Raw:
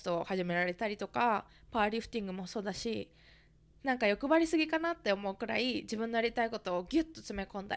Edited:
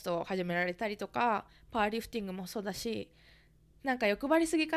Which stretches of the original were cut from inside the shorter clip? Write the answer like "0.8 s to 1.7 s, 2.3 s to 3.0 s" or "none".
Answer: none